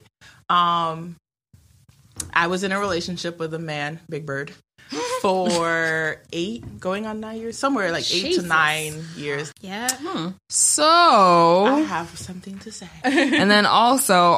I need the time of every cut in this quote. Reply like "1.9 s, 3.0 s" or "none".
9.5 s, 13.0 s